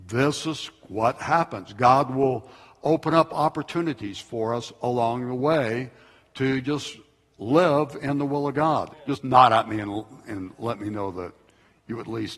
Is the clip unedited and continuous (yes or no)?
no